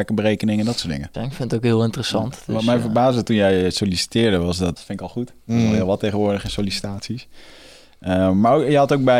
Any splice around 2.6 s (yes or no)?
no